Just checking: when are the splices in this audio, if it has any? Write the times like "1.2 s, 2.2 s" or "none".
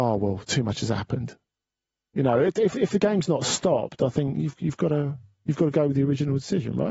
none